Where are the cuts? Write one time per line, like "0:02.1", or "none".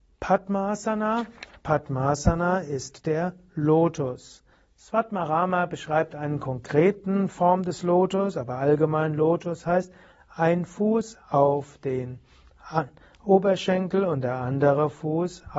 none